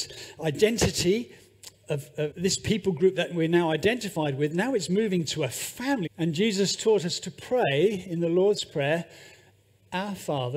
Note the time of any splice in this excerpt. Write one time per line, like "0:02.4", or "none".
0:02.3
0:06.1